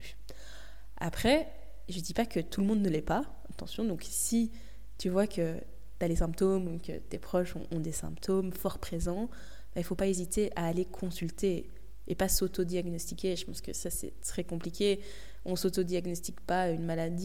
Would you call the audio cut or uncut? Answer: uncut